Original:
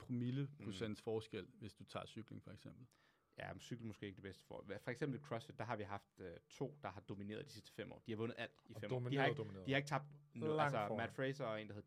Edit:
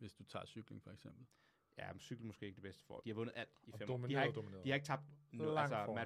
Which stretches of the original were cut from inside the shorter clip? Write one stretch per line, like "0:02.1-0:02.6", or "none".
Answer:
0:04.6-0:08.0